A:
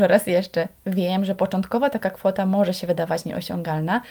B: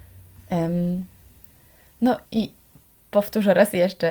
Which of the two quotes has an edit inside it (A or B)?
B